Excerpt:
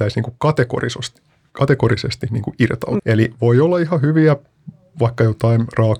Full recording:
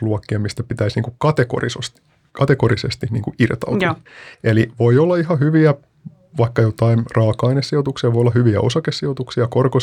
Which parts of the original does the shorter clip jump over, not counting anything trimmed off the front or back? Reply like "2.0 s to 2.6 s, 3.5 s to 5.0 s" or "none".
3.8 s to 4.4 s